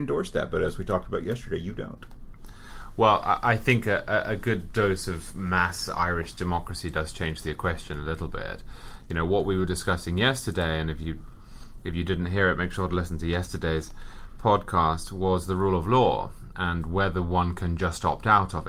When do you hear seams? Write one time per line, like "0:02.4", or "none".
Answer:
none